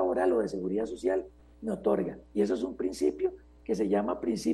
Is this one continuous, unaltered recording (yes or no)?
yes